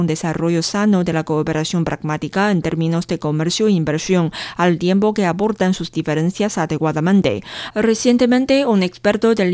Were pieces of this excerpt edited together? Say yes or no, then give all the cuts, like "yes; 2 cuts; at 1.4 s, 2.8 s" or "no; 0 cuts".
yes; 1 cut; at 7.7 s